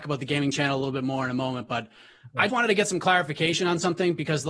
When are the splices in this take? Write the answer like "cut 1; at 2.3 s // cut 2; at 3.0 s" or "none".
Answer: cut 1; at 2.5 s